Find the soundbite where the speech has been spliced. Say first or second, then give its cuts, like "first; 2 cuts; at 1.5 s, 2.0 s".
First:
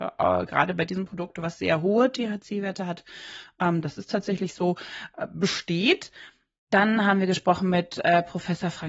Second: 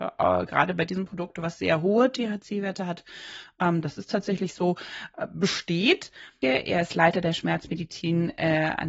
second; 1 cut; at 6.4 s